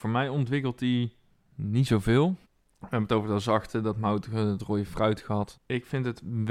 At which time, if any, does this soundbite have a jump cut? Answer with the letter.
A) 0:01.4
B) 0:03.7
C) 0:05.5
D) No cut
C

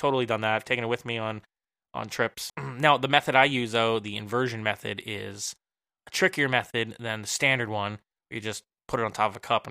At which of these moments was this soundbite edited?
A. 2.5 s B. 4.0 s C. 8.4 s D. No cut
A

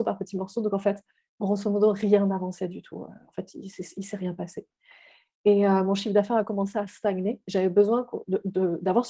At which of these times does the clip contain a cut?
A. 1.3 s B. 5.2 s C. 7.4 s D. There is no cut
C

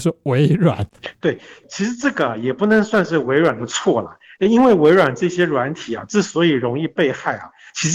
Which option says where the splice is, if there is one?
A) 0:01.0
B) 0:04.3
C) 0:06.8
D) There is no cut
A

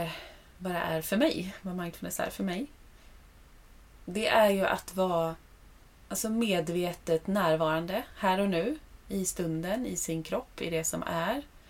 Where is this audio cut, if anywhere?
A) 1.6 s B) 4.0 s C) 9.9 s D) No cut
D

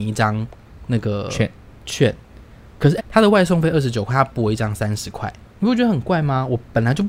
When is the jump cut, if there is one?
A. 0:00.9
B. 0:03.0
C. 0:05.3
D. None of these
B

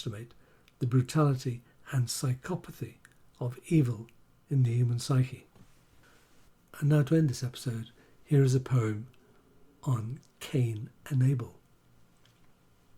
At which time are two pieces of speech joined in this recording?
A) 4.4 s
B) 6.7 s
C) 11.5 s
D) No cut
D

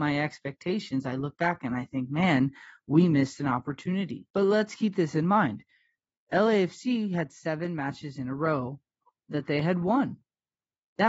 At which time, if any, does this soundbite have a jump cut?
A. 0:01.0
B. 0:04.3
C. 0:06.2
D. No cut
D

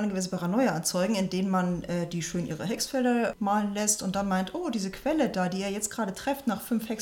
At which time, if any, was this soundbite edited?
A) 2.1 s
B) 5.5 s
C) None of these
C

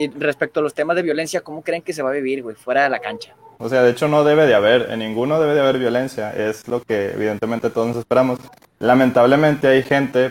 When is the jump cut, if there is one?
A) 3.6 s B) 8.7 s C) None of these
A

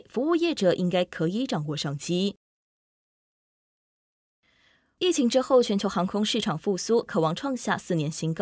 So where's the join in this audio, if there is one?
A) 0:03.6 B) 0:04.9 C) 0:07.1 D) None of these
C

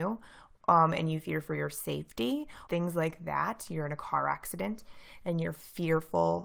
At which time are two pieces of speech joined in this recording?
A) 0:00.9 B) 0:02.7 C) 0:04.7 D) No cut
B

